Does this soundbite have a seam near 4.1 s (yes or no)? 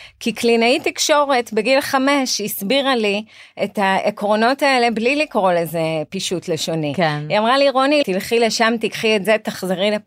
no